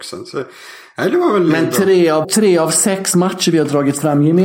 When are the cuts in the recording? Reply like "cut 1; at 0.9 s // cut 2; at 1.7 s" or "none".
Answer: cut 1; at 2.2 s